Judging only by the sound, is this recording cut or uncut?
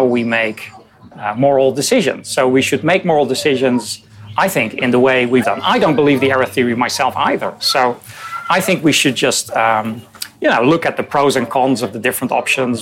cut